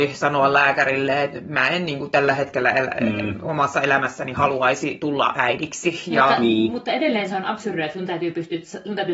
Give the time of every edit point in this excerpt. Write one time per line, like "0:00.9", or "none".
none